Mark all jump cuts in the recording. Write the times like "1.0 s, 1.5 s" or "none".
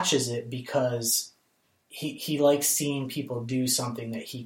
none